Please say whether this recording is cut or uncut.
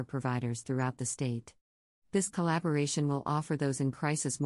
uncut